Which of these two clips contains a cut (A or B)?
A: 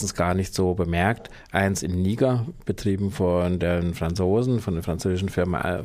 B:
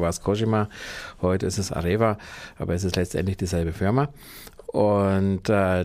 B